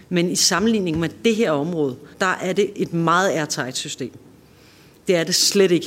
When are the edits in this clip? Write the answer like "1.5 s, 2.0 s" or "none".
2.1 s

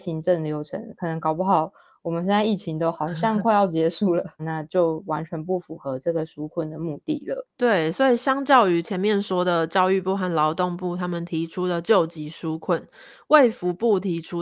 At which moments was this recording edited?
4.4 s, 7.5 s

